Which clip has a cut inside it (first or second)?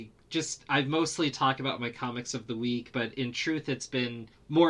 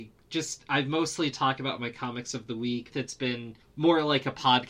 second